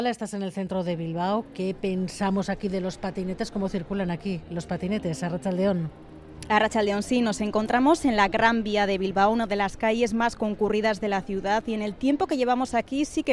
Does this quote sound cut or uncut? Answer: uncut